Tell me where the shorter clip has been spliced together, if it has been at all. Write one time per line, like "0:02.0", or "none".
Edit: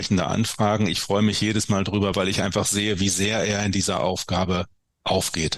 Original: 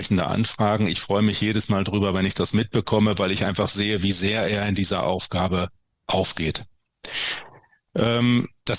0:02.1